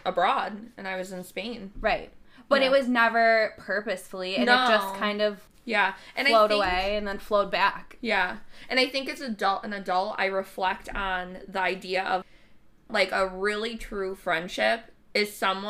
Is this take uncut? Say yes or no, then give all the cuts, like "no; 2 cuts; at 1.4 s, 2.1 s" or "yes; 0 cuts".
yes; 0 cuts